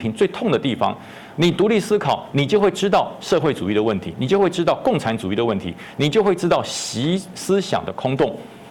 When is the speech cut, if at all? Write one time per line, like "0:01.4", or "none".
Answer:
0:01.4